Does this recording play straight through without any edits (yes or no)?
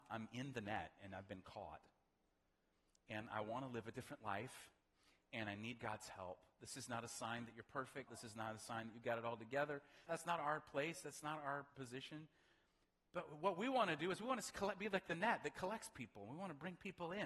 no